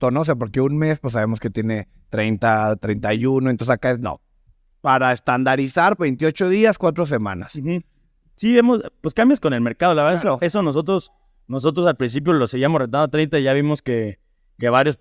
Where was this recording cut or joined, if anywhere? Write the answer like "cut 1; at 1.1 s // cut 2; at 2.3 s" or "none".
cut 1; at 6.0 s